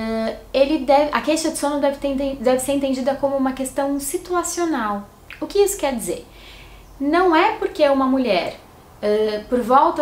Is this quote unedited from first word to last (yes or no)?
yes